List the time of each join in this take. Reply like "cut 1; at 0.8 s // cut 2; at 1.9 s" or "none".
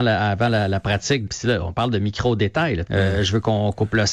cut 1; at 1.3 s // cut 2; at 2.9 s